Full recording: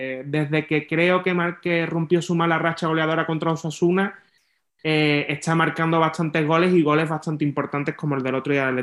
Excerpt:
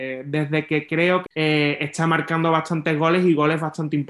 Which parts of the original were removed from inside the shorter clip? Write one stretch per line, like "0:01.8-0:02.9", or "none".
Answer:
0:01.3-0:04.7